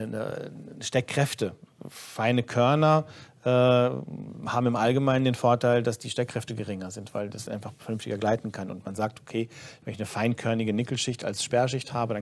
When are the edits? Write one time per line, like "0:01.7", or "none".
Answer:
none